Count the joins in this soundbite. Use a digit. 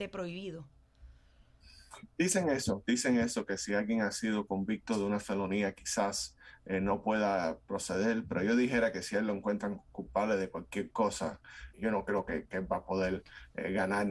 1